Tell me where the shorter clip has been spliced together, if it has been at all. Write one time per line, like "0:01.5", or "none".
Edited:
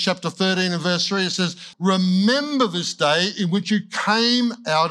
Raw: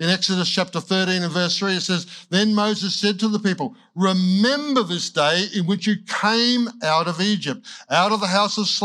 0:01.7